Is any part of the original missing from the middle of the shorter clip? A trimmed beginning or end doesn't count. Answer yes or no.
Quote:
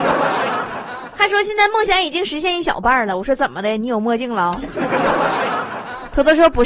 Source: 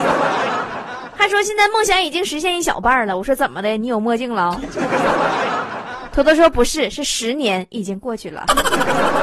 no